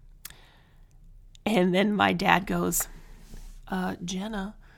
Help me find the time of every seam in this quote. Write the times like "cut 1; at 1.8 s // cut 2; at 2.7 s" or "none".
none